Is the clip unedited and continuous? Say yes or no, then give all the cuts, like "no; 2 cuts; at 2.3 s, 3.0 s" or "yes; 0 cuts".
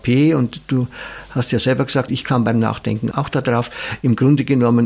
no; 2 cuts; at 2.1 s, 3.1 s